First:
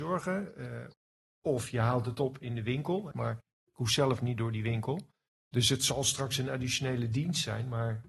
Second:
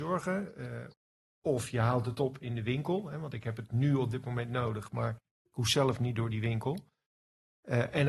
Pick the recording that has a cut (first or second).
first